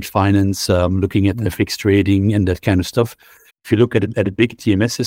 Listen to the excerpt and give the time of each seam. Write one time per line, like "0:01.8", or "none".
0:03.5